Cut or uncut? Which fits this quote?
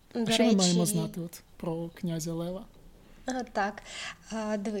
uncut